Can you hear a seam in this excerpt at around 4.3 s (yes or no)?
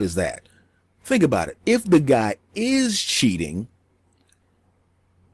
no